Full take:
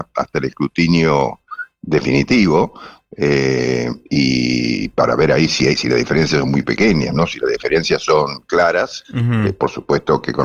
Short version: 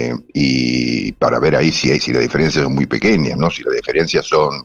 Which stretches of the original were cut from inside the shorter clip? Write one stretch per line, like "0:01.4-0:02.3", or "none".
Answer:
none